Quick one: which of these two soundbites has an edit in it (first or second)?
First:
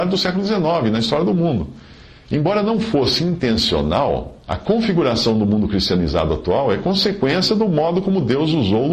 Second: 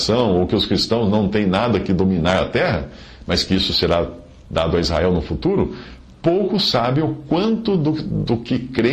first